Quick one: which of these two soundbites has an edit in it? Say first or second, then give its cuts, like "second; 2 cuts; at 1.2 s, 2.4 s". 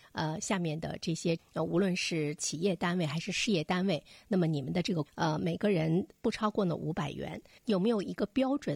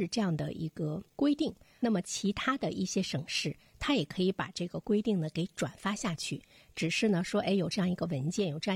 first; 2 cuts; at 5.1 s, 7.6 s